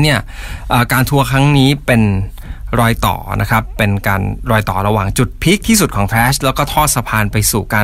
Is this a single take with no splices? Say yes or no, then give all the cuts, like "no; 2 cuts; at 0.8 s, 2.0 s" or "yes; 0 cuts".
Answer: yes; 0 cuts